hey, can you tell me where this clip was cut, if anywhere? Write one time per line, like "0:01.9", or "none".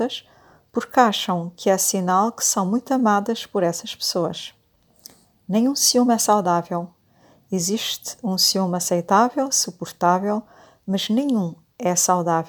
none

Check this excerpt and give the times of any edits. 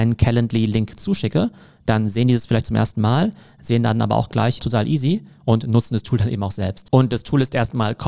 0:04.6
0:06.9

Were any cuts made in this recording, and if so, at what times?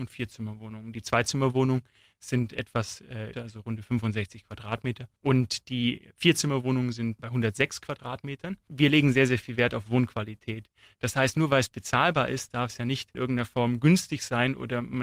0:03.3

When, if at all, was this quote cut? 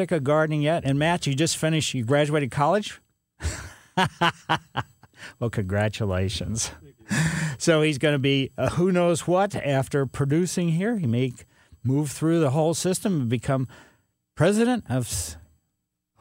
none

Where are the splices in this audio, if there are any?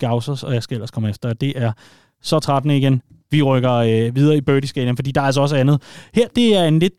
none

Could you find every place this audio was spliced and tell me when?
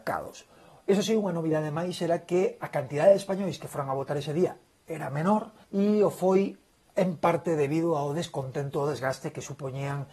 0:05.6

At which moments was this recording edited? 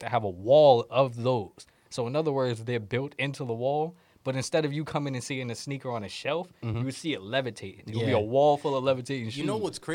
none

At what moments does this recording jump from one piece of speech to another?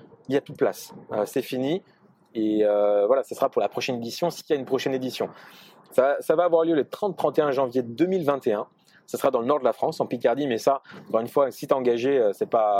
0:05.9

